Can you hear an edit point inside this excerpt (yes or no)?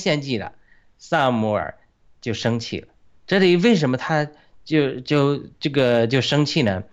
no